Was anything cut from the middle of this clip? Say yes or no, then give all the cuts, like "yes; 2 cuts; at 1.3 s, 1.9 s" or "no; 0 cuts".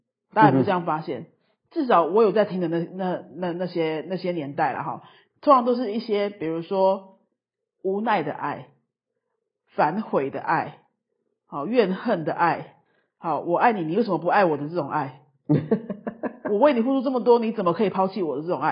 no; 0 cuts